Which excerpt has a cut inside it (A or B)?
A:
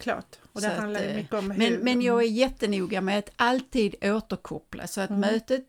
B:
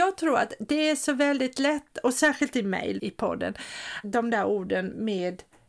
B